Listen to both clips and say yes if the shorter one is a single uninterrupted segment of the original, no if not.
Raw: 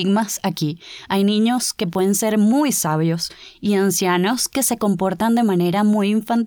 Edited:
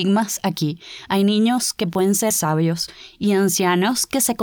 no